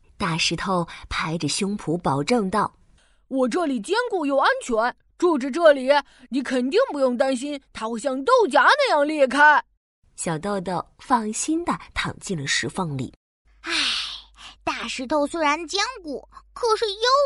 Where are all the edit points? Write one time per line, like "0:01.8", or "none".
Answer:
0:13.4